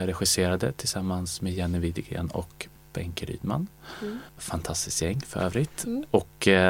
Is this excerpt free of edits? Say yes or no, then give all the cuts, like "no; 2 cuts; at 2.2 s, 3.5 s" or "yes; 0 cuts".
no; 1 cut; at 4.3 s